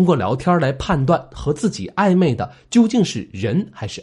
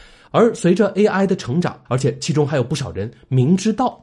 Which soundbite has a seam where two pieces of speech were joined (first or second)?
second